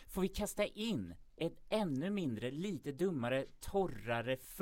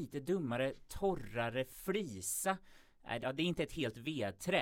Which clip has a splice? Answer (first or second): second